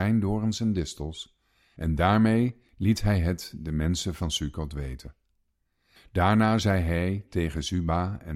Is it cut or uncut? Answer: cut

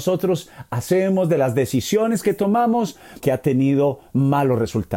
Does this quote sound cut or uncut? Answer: cut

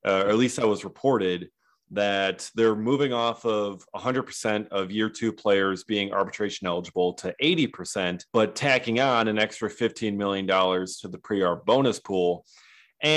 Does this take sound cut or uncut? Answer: cut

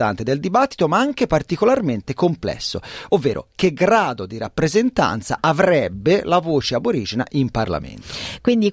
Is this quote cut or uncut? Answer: uncut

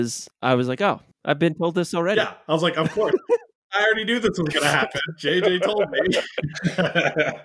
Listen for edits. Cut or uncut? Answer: uncut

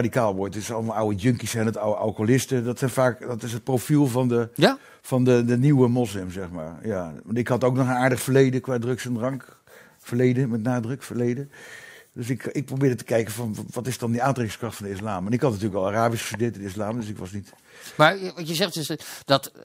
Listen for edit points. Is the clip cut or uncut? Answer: uncut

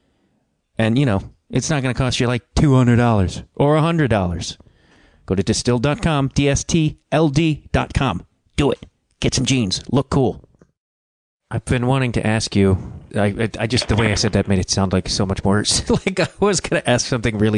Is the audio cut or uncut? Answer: cut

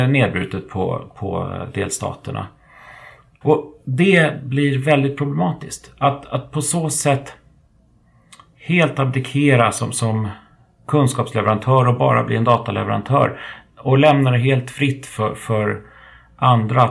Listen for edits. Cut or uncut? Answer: cut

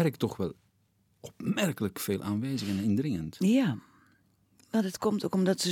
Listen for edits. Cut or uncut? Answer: uncut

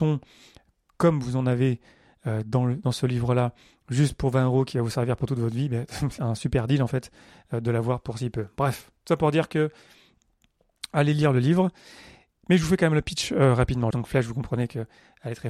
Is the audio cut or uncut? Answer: cut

